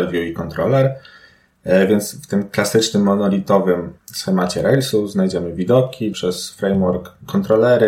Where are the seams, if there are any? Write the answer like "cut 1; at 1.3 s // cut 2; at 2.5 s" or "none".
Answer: cut 1; at 4.0 s // cut 2; at 6.1 s